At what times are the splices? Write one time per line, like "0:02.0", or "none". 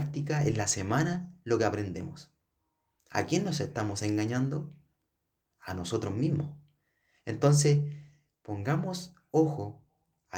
none